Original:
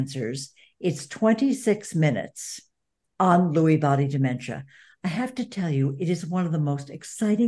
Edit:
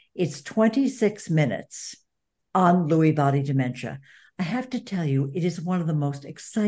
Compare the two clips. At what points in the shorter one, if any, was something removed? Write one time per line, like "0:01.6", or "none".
none

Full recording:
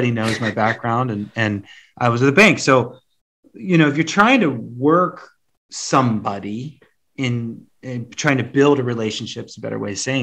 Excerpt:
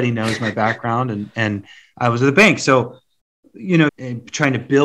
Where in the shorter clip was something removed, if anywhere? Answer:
0:03.9

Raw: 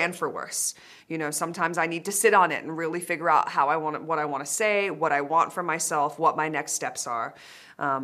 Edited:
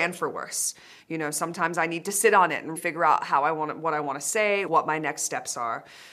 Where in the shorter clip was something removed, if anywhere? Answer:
0:02.8
0:04.7

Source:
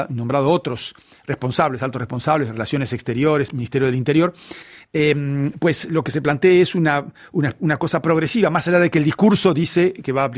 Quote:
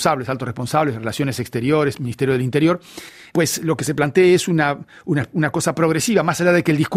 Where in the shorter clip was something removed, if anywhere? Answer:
0:03.3

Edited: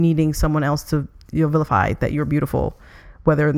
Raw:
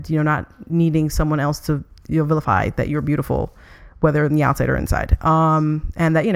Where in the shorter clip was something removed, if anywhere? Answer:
none

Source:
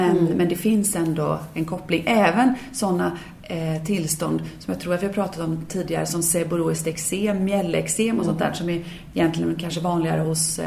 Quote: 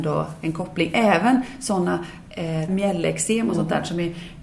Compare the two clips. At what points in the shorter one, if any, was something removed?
0:02.7

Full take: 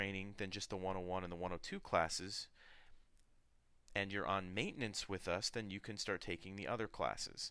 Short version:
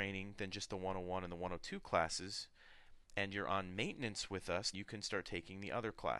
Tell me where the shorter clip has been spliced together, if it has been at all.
0:03.0
0:04.7

